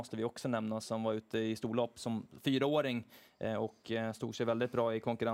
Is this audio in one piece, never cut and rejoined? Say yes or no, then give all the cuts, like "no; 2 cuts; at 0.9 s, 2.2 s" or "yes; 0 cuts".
yes; 0 cuts